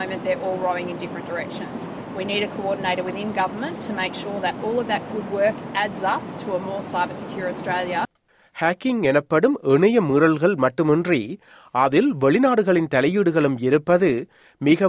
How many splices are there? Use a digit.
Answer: 0